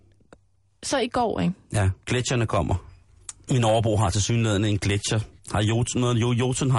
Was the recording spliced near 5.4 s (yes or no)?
no